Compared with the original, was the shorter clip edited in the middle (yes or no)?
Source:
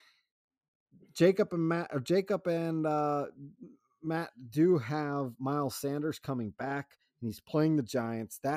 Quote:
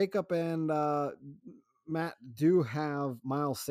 no